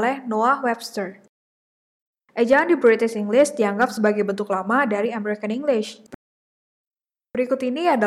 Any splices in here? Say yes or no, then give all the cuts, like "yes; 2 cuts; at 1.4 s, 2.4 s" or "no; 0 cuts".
yes; 1 cut; at 2.3 s